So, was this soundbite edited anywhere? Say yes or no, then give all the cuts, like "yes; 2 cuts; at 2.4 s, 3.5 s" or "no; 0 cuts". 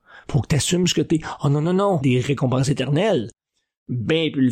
yes; 1 cut; at 2.0 s